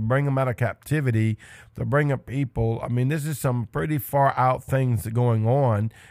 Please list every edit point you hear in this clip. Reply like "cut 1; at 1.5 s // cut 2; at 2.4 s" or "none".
none